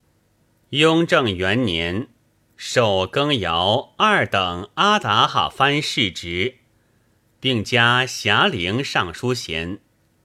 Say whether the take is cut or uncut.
cut